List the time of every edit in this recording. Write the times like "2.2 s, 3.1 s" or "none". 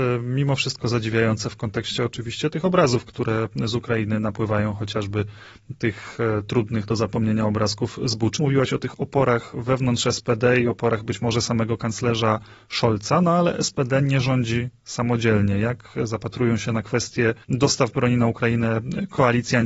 8.4 s, 17.4 s